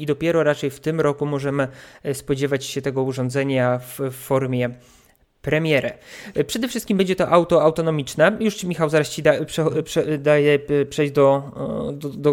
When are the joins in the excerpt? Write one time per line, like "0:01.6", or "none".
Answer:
none